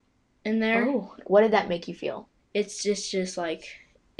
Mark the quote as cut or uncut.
cut